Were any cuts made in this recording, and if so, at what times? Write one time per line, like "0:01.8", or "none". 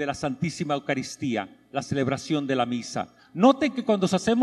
0:03.2